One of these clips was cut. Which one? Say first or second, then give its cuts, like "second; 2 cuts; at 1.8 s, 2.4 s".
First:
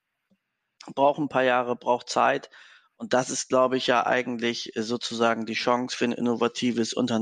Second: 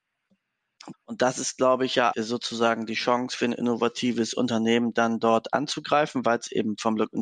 second; 2 cuts; at 0.9 s, 2.1 s